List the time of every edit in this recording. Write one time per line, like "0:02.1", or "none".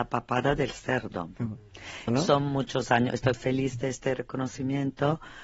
0:02.1
0:03.3